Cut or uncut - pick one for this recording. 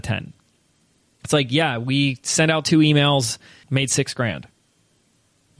cut